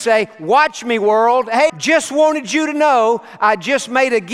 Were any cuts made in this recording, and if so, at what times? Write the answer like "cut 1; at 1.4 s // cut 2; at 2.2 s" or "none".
cut 1; at 1.7 s